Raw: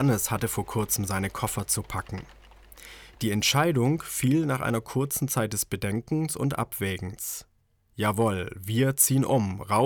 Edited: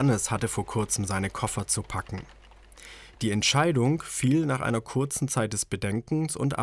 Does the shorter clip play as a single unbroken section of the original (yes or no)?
yes